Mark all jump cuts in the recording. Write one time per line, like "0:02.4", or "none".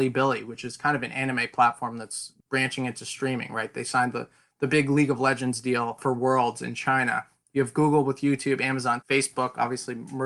0:09.0